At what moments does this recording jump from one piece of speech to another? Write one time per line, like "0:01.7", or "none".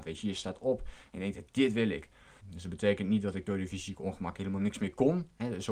0:02.4